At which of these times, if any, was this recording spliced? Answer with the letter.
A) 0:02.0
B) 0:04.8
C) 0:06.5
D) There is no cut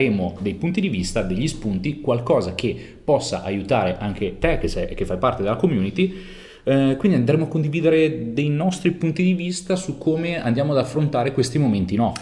D